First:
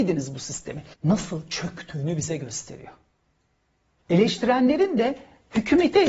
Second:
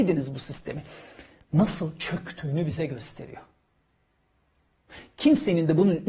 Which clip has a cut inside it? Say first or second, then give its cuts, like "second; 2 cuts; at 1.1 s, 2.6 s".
first; 2 cuts; at 0.9 s, 4.0 s